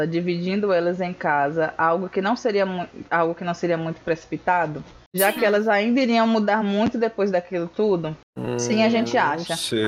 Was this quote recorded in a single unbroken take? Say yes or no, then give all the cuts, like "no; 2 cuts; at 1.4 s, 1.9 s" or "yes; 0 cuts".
yes; 0 cuts